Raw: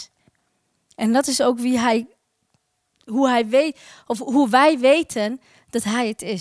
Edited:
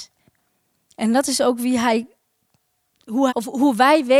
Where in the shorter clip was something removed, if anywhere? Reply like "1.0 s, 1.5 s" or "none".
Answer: 3.3 s